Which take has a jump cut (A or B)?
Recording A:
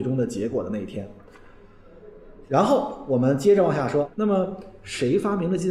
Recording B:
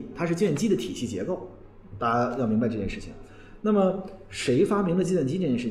A